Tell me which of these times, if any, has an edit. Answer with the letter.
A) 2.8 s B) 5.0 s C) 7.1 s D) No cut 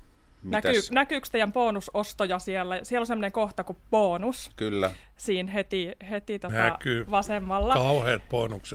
D